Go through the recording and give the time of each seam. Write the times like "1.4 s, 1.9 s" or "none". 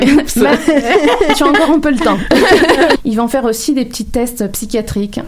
3.0 s